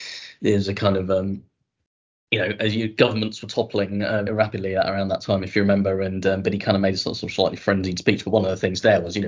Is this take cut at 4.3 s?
yes; 1 cut; at 4.3 s

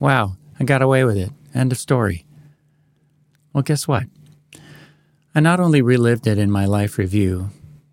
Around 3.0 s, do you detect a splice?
no; 0 cuts

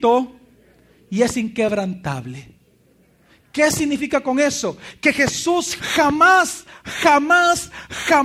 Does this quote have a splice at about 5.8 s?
yes; 1 cut; at 5.8 s

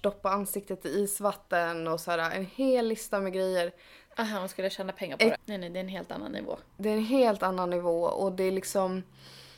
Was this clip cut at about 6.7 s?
no; 2 cuts; at 4.1 s, 5.3 s

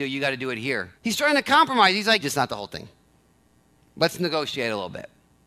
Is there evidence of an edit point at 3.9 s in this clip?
no; 2 cuts; at 1.0 s, 2.2 s

